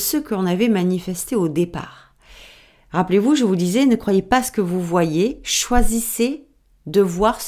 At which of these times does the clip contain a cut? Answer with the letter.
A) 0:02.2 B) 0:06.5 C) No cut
C